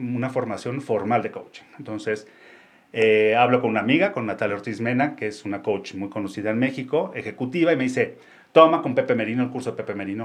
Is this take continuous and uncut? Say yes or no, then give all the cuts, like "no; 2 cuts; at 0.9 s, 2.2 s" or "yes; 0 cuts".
yes; 0 cuts